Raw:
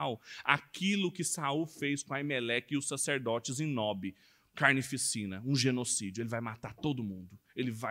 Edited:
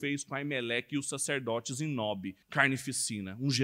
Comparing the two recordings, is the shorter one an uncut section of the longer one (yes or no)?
no